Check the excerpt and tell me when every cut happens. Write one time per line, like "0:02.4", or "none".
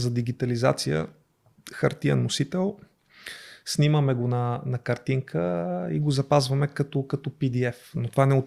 none